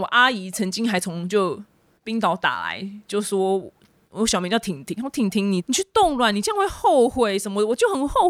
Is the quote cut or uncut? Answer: cut